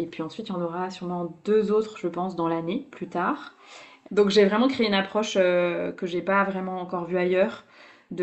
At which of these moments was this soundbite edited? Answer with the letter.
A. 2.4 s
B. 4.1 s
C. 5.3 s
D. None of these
B